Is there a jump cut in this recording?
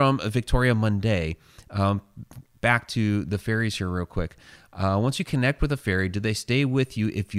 no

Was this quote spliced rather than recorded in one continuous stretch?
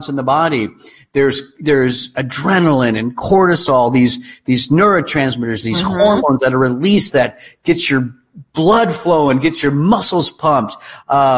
no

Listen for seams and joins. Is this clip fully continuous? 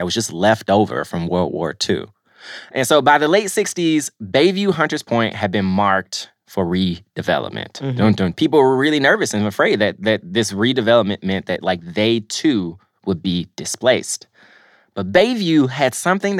no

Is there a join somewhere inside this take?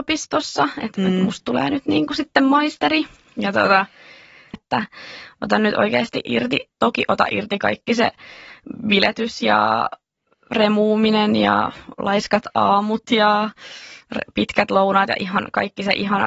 yes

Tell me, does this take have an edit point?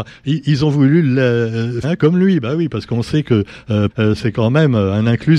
yes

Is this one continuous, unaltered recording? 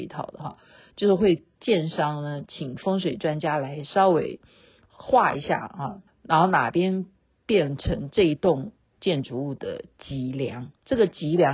no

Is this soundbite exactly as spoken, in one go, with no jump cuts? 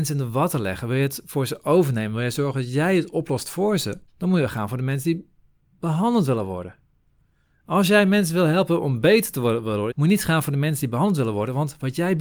no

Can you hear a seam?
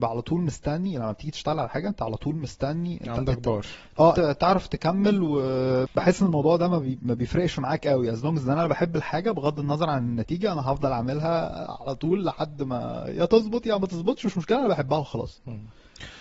yes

